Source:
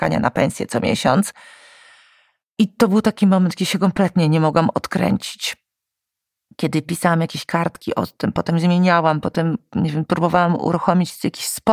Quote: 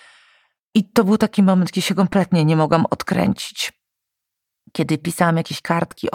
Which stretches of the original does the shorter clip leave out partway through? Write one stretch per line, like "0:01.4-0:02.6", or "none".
none